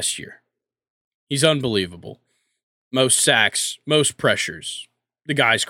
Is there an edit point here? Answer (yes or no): no